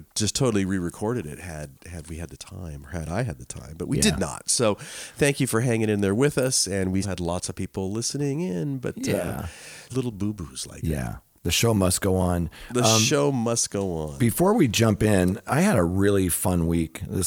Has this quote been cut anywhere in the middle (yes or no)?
yes